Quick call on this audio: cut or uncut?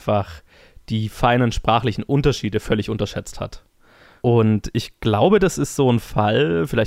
uncut